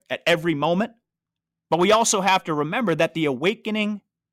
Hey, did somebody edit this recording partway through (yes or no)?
no